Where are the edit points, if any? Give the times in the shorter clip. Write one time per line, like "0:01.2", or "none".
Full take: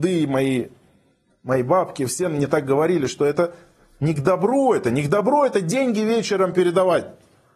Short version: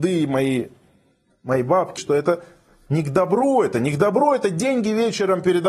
0:02.0